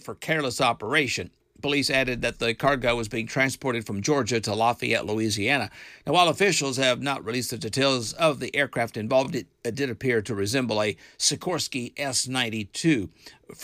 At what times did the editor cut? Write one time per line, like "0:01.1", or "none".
none